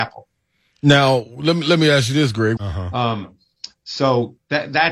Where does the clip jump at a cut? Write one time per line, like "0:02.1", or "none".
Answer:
0:02.6